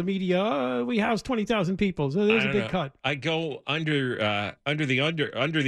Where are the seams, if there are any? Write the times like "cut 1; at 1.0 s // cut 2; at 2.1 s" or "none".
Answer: none